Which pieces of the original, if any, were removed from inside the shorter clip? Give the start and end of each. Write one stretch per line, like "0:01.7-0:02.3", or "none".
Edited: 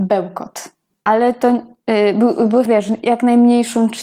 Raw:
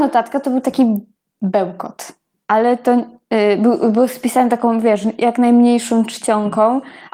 0:04.1-0:04.8